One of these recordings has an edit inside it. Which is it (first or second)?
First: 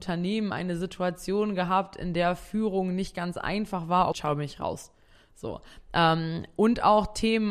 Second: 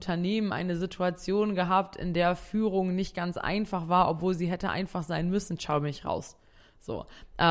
first